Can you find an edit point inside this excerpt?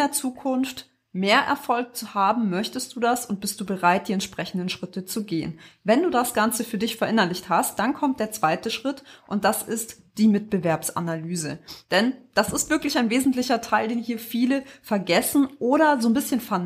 no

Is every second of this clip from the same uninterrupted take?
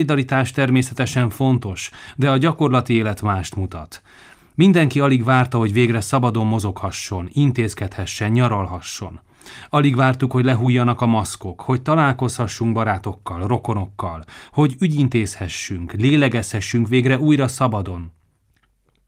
yes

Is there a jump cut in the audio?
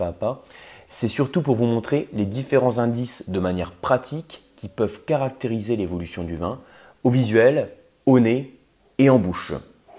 no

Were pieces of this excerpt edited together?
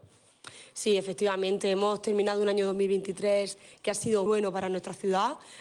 yes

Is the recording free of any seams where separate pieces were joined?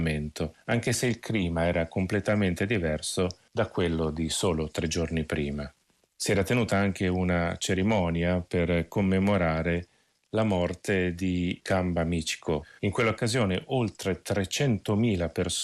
no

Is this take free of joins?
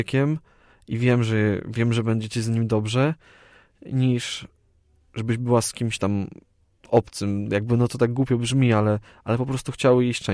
yes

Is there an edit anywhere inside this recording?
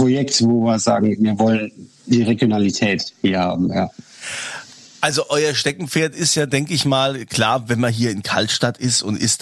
no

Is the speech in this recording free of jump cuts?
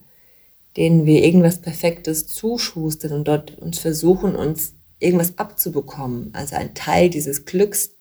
yes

